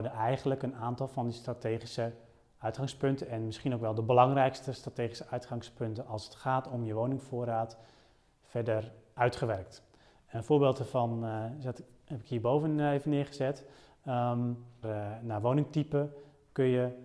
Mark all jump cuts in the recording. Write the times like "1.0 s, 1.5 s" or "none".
14.8 s